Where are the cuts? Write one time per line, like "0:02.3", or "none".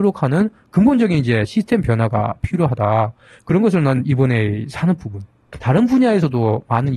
0:05.6